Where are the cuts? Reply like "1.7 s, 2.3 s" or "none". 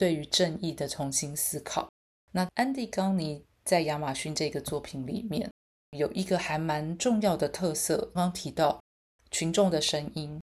8.2 s